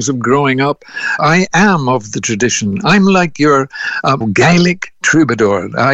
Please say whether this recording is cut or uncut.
cut